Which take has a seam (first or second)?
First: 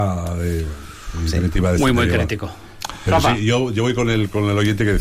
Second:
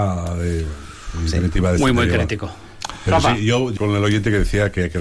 second